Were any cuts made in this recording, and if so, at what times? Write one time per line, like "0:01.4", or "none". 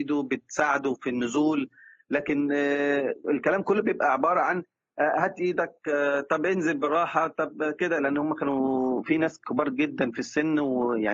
none